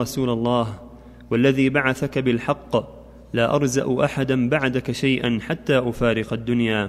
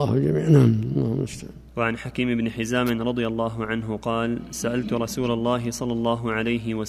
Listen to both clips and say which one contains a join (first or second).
second